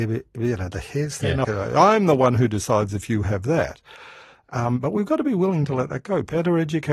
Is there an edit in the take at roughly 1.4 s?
yes; 1 cut; at 1.4 s

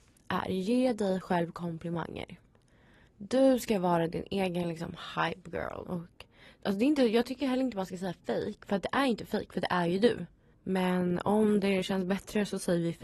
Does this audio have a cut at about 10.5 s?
yes; 2 cuts; at 5.8 s, 10.5 s

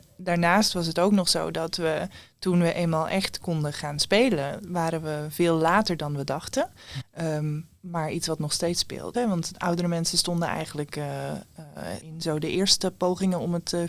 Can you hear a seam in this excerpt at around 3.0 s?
no; 3 cuts; at 7.0 s, 9.1 s, 12.0 s

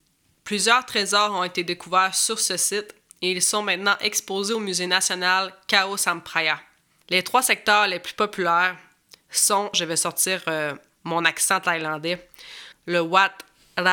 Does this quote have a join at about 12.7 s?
yes; 3 cuts; at 7.0 s, 9.7 s, 12.7 s

